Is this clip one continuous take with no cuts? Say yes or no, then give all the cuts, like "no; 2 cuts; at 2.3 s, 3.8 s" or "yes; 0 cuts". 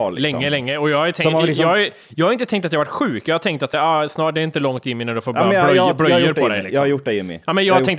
yes; 0 cuts